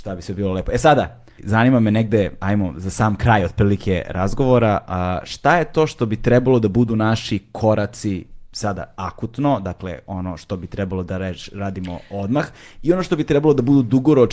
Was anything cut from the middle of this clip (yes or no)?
yes